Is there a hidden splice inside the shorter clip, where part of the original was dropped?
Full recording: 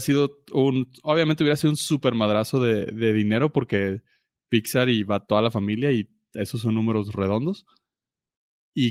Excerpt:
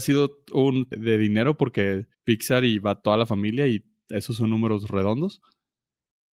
yes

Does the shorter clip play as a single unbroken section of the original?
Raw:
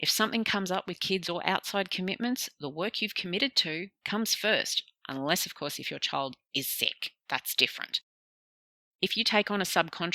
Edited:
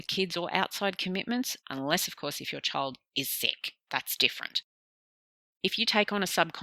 no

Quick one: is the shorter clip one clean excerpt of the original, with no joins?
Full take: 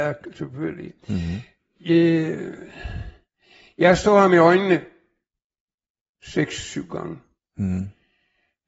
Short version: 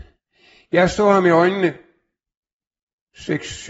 yes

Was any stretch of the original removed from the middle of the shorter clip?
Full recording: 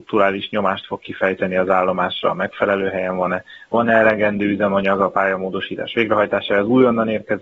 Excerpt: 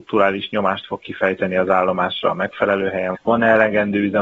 yes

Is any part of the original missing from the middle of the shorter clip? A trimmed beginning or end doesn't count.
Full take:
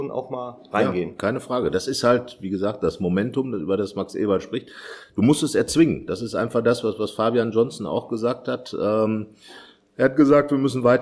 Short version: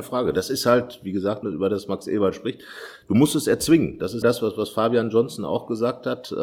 yes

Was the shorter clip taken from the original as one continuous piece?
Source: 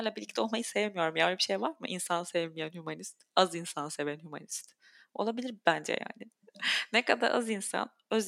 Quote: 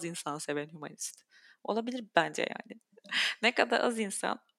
yes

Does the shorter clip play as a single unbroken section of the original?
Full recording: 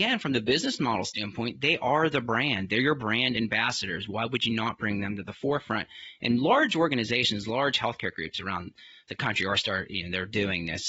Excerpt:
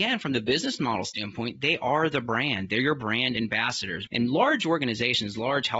no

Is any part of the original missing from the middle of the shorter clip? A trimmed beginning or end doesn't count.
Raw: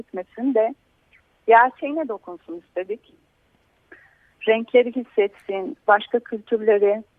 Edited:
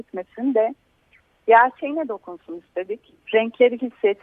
yes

